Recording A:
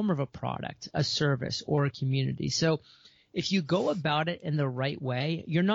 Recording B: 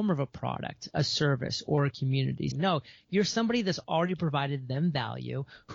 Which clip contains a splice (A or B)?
B